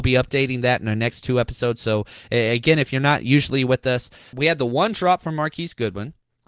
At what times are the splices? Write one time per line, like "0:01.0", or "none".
0:04.3